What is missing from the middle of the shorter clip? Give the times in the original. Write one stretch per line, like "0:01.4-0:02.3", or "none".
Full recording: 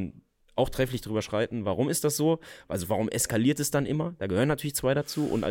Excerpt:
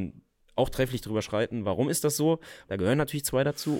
0:02.7-0:04.2

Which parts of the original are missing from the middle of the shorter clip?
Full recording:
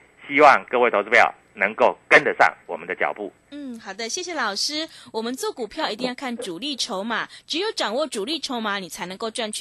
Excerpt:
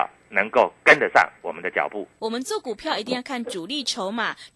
0:03.4-0:05.1

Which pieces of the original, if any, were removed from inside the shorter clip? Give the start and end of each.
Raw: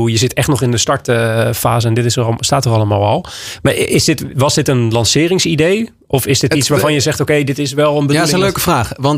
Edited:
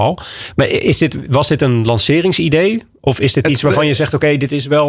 none

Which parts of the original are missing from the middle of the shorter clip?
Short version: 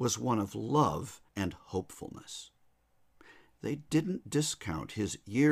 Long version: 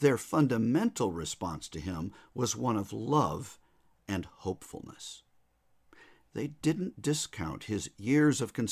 0:03.7-0:04.0

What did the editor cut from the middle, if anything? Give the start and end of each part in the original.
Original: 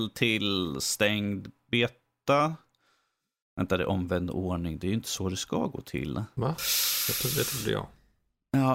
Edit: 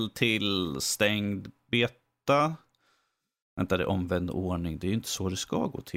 none

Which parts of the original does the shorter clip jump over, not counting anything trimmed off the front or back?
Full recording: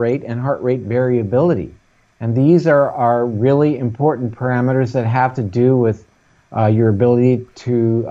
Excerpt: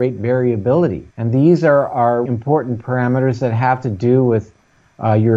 0:01.8-0:02.1
0:03.3-0:03.8

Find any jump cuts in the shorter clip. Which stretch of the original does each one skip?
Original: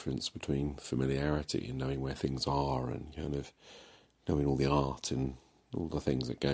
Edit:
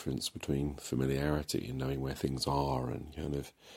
none

